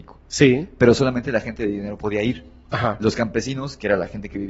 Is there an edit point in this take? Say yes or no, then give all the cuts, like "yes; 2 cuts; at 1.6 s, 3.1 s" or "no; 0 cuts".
no; 0 cuts